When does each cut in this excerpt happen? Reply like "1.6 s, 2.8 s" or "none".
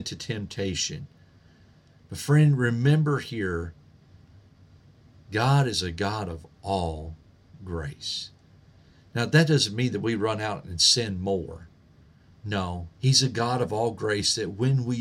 12.9 s